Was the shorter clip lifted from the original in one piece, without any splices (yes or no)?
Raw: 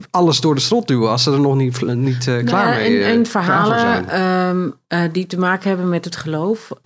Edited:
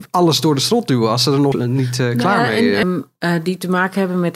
no